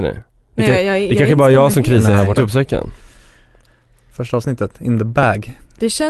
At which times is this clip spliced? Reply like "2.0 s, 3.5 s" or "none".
2.4 s